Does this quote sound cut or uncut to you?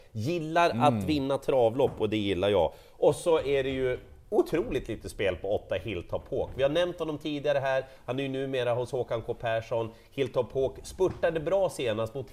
uncut